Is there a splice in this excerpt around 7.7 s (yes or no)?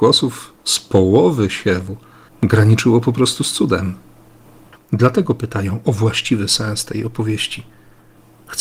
no